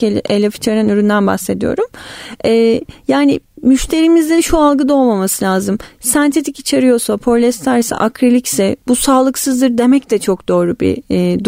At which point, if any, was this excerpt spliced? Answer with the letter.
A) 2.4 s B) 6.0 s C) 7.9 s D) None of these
D